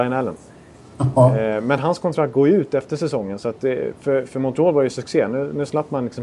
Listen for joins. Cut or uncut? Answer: uncut